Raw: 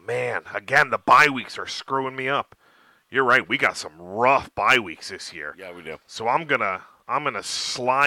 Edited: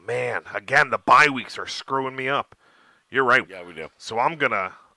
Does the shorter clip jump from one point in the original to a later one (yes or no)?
yes